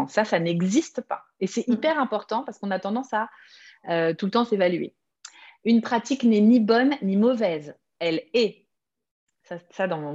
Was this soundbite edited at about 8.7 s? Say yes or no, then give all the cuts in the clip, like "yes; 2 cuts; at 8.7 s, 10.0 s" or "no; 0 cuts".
no; 0 cuts